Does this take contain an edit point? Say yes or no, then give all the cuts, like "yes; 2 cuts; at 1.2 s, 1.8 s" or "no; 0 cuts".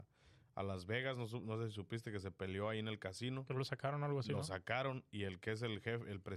no; 0 cuts